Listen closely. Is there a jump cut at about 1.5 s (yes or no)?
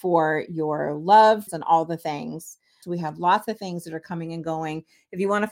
yes